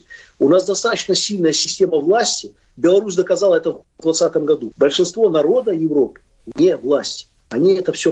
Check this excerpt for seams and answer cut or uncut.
cut